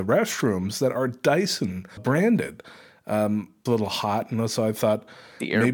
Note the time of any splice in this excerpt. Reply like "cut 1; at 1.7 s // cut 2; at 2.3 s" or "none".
cut 1; at 2.0 s // cut 2; at 3.7 s